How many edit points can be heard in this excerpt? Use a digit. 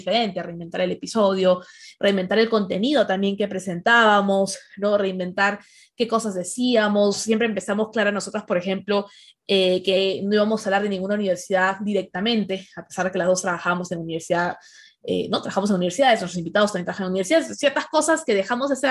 0